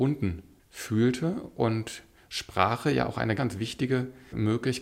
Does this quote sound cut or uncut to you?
cut